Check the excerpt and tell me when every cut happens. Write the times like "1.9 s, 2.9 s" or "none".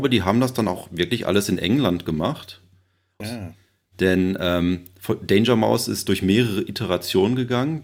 3.2 s

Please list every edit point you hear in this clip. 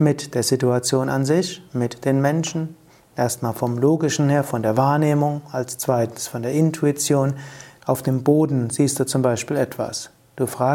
7.8 s

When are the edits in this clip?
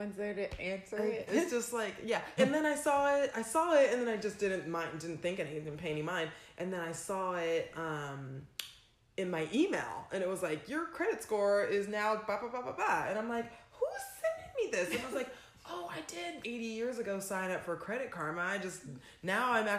1.3 s, 2.4 s, 16.4 s

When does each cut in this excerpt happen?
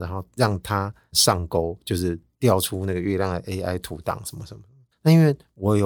4.9 s

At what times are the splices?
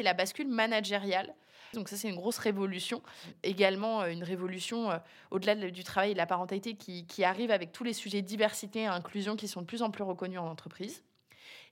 1.7 s

